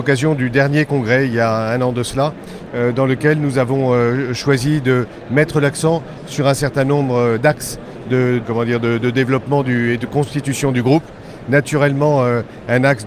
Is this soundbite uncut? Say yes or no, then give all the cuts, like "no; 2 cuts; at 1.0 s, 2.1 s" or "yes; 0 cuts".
no; 1 cut; at 8.4 s